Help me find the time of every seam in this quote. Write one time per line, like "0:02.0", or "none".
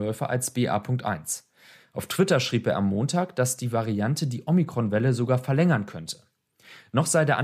0:01.8